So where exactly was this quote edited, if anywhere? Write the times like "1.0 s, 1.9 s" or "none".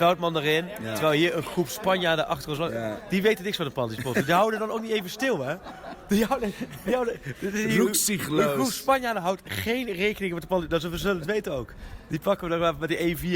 none